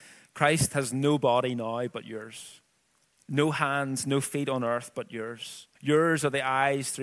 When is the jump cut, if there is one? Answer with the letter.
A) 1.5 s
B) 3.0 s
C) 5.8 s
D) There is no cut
C